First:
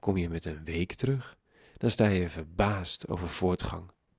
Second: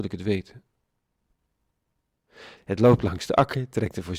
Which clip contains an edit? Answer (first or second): second